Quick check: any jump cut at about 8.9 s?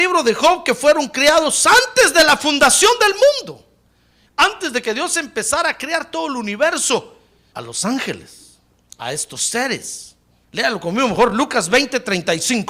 no; 3 cuts; at 4.3 s, 7.5 s, 10.4 s

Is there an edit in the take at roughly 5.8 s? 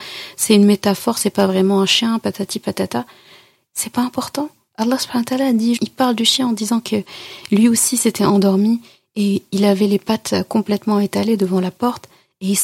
yes; 2 cuts; at 3.6 s, 5.8 s

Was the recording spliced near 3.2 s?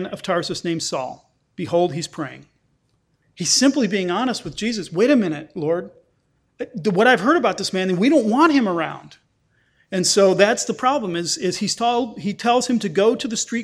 yes; 1 cut; at 3.2 s

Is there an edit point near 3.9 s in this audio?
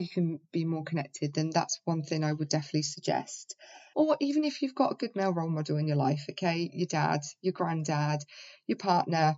yes; 1 cut; at 3.9 s

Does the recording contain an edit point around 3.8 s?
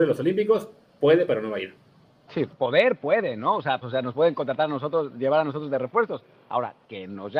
yes; 1 cut; at 3.8 s

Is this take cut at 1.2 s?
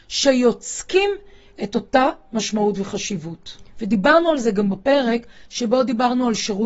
no; 1 cut; at 3.7 s

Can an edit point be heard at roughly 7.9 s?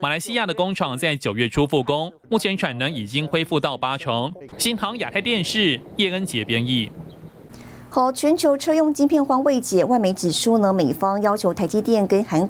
no; 1 cut; at 4.5 s

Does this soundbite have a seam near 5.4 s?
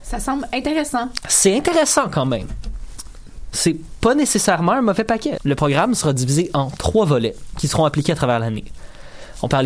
yes; 1 cut; at 5.4 s

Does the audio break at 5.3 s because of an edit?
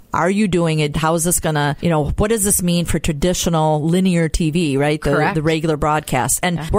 no; 1 cut; at 0.9 s

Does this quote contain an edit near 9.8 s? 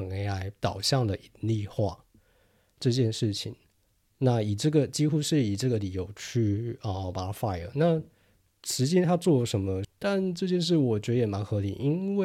yes; 1 cut; at 9.8 s

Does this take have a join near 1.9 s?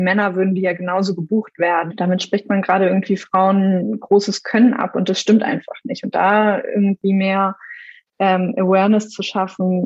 yes; 1 cut; at 1.9 s

